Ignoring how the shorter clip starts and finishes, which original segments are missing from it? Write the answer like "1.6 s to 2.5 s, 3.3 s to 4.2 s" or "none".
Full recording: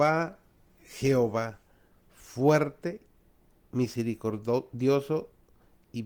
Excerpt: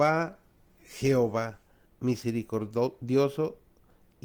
1.8 s to 3.6 s